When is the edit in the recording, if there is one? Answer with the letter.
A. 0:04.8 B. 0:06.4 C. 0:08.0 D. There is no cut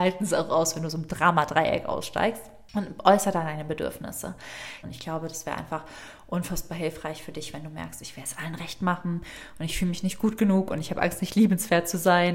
A